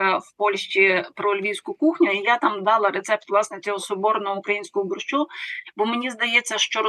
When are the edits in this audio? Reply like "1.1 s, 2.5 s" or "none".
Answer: none